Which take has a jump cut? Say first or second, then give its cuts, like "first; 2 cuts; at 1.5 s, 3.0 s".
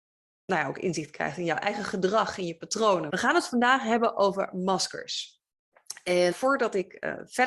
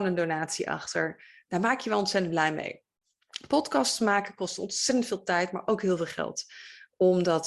first; 2 cuts; at 3.1 s, 6.3 s